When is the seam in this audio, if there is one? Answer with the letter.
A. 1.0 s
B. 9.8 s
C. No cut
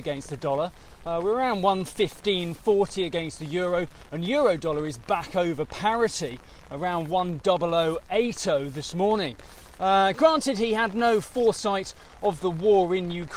B